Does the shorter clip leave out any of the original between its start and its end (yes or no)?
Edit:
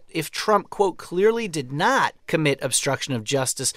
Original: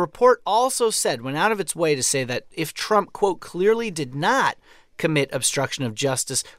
yes